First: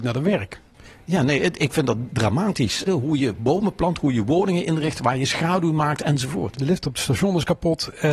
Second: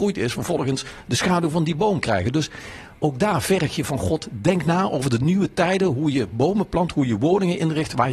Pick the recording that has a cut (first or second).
first